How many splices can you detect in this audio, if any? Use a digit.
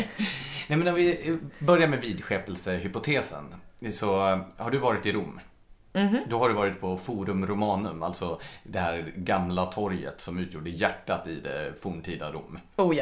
0